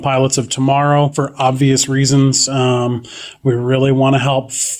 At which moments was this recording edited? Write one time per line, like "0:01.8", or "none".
none

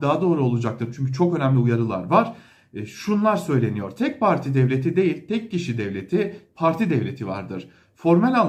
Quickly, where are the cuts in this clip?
0:06.5

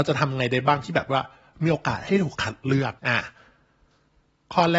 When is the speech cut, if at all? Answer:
0:03.0

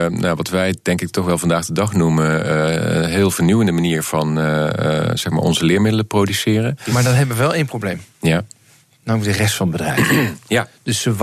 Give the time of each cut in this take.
none

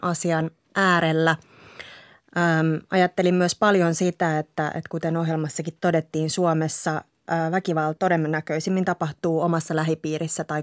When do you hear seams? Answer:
0:08.0

